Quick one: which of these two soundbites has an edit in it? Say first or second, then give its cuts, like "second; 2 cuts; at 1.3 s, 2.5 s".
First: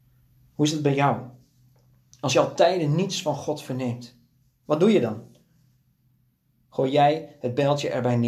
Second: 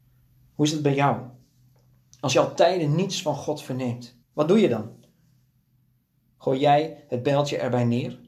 second; 1 cut; at 4.2 s